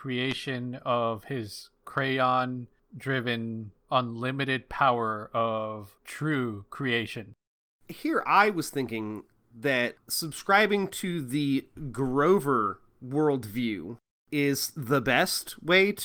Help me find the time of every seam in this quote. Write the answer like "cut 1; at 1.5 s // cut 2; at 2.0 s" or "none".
cut 1; at 3.8 s